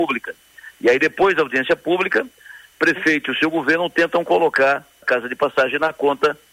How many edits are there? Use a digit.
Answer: 1